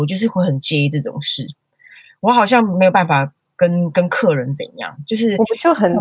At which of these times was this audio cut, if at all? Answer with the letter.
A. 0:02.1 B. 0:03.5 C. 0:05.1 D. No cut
D